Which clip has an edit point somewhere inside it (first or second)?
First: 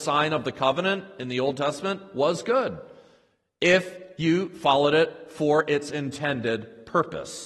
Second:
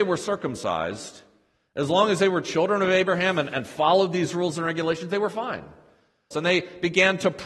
second